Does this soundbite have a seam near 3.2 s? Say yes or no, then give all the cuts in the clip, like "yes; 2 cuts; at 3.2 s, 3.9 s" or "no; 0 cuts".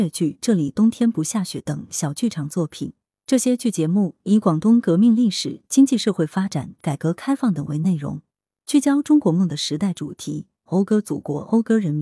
no; 2 cuts; at 6.8 s, 10.7 s